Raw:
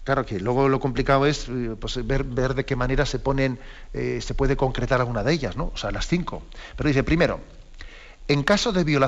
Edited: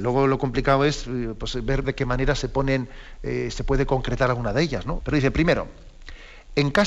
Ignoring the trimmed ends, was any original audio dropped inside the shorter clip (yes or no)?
yes